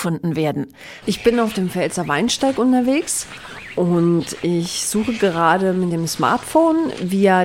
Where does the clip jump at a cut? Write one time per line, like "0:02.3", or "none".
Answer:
0:01.0